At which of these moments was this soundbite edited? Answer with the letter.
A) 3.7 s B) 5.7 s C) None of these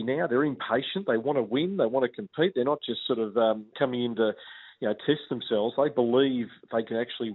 A